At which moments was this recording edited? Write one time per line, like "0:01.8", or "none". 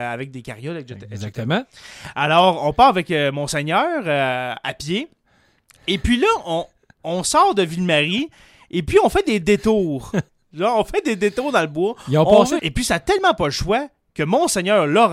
0:10.3
0:12.6